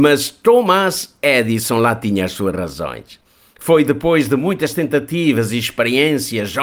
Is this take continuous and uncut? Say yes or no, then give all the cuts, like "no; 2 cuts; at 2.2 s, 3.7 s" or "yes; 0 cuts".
yes; 0 cuts